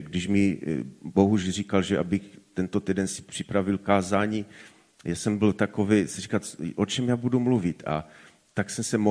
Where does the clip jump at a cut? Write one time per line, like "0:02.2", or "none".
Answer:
none